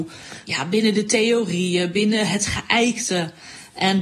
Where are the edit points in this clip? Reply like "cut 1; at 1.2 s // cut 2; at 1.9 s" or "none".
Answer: none

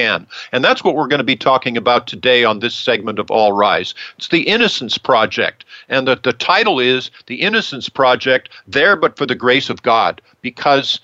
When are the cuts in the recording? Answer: none

